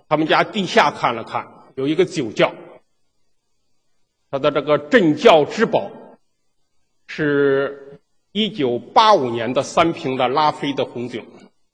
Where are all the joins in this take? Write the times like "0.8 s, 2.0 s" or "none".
none